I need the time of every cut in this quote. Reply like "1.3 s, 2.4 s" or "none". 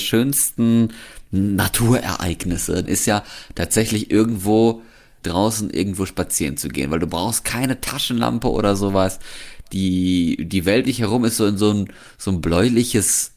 2.9 s, 5.2 s, 10.8 s